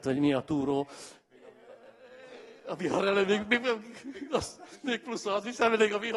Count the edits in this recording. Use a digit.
0